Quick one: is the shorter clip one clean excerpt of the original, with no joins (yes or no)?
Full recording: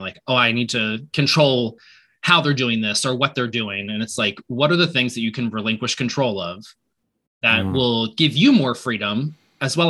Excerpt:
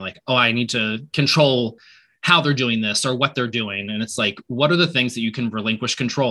yes